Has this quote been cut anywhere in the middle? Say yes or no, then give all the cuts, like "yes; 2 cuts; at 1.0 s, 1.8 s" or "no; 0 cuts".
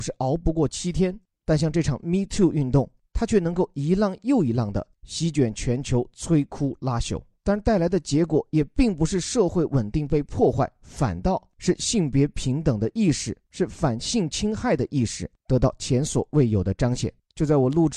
yes; 1 cut; at 7.4 s